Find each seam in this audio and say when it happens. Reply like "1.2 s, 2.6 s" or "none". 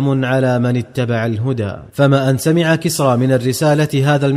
1.9 s